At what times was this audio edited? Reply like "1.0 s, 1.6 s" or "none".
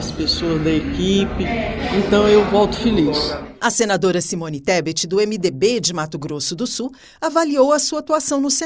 none